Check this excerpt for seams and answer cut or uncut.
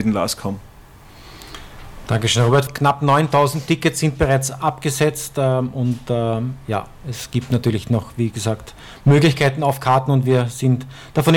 cut